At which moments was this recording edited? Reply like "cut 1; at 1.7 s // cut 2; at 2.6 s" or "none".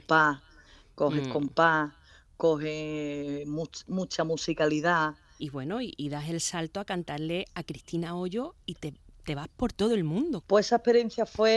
cut 1; at 5.4 s // cut 2; at 10.4 s